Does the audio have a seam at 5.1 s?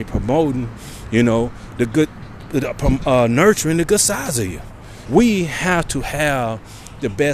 yes; 1 cut; at 5.1 s

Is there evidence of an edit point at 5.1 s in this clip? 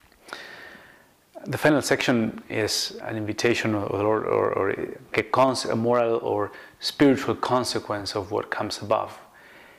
yes; 2 cuts; at 3.0 s, 5.1 s

